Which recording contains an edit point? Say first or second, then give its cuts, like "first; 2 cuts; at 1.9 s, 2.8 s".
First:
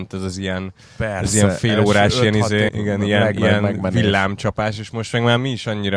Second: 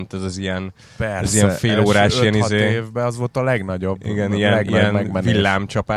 first; 1 cut; at 2.7 s